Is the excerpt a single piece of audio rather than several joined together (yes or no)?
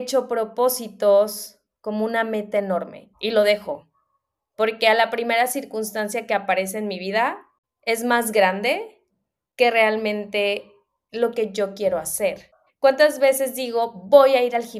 no